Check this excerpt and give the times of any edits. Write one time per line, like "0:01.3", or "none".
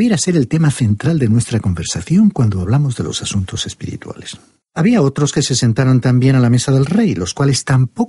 none